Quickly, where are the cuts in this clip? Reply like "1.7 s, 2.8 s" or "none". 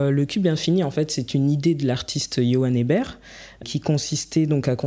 3.6 s